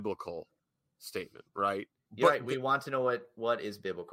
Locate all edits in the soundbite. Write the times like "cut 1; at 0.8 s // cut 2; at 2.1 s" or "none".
cut 1; at 2.1 s